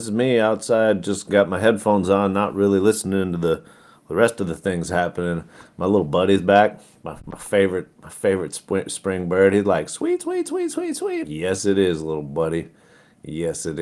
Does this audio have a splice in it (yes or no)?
yes